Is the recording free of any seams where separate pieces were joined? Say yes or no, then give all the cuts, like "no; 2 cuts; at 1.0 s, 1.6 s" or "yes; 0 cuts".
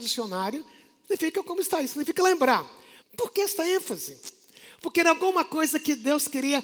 no; 1 cut; at 3.0 s